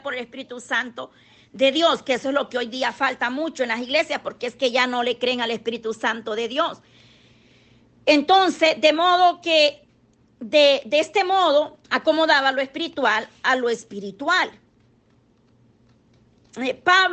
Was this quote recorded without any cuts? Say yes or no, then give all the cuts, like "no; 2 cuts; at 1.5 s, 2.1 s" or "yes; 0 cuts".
no; 2 cuts; at 10.3 s, 11.8 s